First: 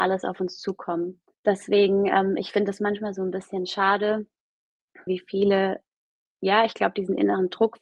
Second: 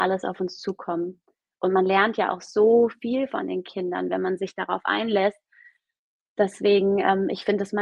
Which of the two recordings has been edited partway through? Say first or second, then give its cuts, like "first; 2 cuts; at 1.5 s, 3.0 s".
first; 2 cuts; at 1.3 s, 5.1 s